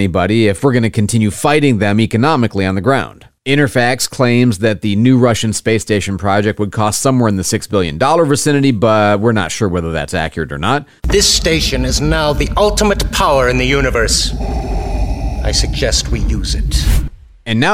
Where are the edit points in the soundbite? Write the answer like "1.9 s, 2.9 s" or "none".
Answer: 11.0 s